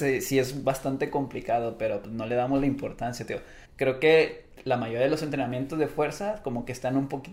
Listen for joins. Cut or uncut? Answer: cut